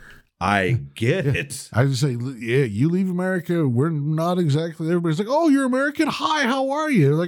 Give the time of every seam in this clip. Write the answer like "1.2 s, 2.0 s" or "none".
none